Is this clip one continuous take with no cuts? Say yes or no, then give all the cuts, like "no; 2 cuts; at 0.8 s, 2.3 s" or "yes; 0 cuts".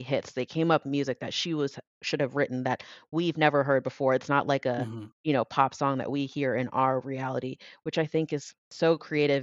yes; 0 cuts